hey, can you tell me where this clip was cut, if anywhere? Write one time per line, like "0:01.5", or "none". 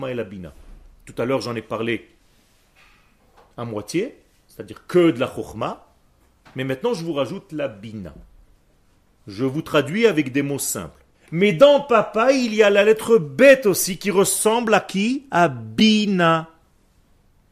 0:11.1